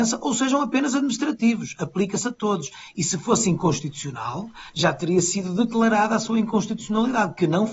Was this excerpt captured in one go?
yes; 0 cuts

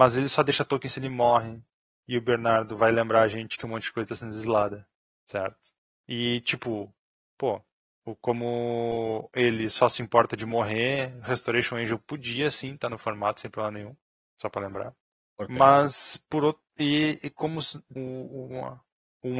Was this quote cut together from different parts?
yes; 1 cut; at 18.0 s

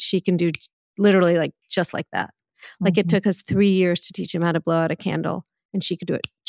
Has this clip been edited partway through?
no; 0 cuts

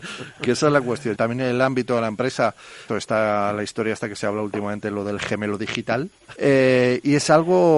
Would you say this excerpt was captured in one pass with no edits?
no; 3 cuts; at 1.2 s, 2.9 s, 6.4 s

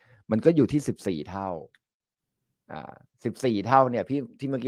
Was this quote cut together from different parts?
no; 0 cuts

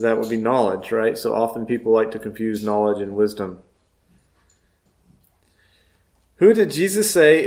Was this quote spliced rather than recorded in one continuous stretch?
no; 0 cuts

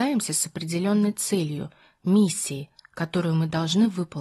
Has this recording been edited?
no; 0 cuts

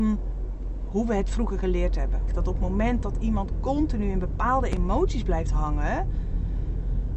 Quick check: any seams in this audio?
yes; 1 cut; at 2.3 s

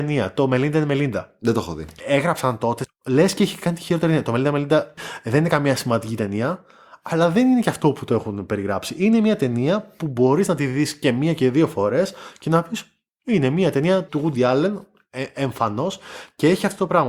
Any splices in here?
no; 0 cuts

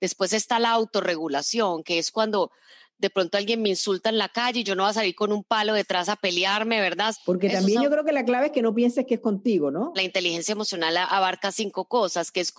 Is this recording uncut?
no; 2 cuts; at 7.1 s, 9.9 s

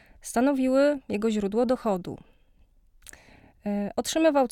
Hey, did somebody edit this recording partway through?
no; 0 cuts

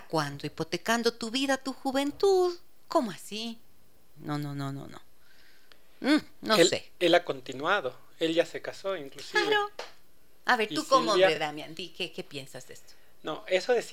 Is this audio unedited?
yes; 0 cuts

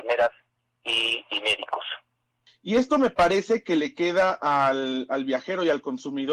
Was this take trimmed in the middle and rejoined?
yes; 1 cut; at 2.5 s

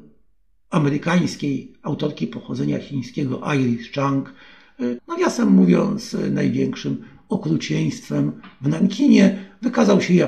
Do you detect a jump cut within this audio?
yes; 1 cut; at 5.0 s

